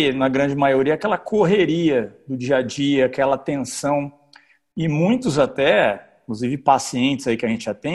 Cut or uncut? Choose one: uncut